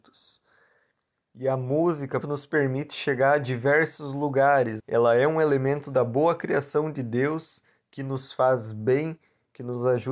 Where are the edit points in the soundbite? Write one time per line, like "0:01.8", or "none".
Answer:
0:02.2
0:04.8

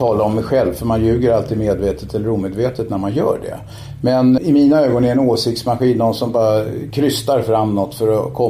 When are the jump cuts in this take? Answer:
0:04.4

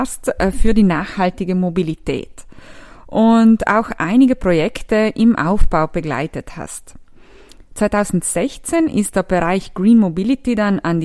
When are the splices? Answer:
none

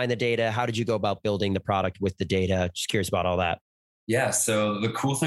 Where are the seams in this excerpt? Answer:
none

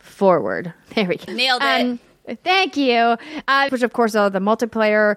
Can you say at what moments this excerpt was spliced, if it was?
0:01.3
0:03.7

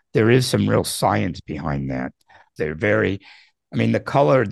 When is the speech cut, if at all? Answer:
0:02.6

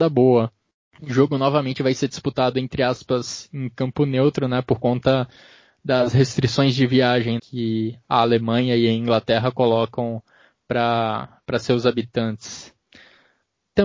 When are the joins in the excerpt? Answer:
0:07.4

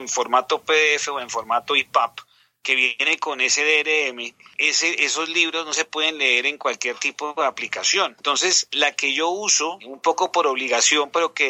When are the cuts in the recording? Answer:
0:08.2

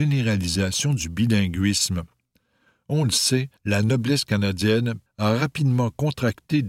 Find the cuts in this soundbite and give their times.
0:03.6
0:05.1

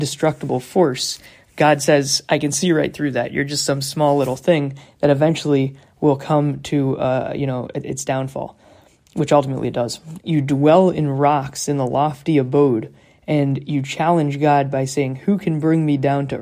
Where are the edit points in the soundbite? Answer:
0:10.2

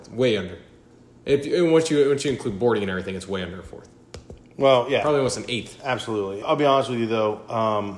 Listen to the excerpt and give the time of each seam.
0:06.4

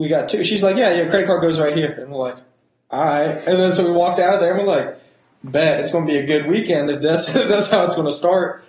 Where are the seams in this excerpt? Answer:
none

